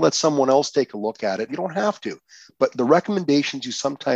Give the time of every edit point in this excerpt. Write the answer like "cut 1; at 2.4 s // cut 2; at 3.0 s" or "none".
cut 1; at 1.5 s